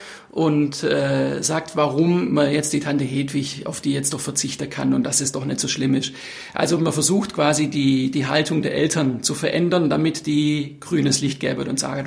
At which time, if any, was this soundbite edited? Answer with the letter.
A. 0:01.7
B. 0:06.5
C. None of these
C